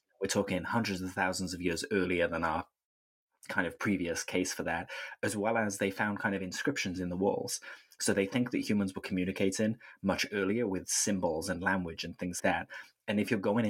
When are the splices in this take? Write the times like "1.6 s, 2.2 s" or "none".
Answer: 12.4 s